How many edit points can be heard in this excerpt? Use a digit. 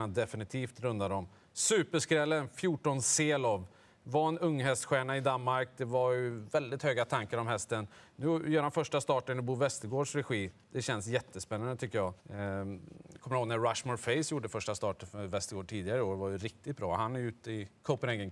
1